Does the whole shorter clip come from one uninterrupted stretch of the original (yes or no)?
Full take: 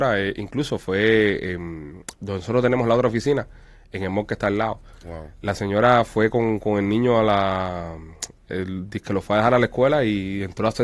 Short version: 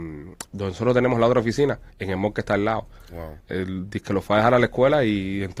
no